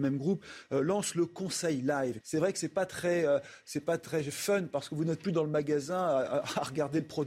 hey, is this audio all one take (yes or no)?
no